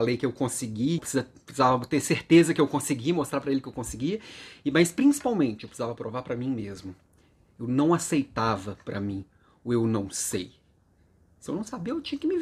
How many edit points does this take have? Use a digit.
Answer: 1